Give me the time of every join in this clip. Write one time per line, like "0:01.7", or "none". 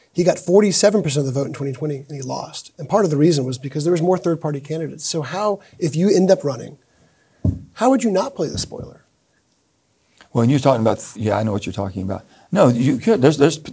0:11.2